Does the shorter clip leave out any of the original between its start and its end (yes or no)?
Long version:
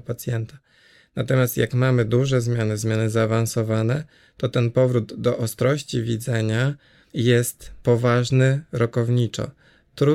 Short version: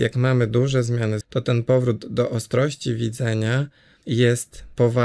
yes